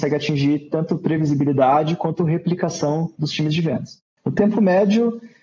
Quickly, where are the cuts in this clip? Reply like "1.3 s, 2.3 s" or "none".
4.2 s